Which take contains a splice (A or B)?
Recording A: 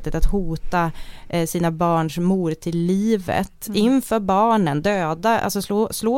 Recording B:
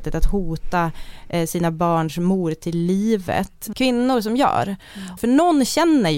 B